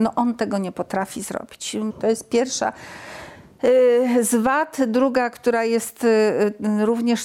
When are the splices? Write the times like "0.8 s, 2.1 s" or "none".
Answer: 1.9 s